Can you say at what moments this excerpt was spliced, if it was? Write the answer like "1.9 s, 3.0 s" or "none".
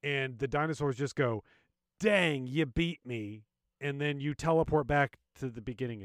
none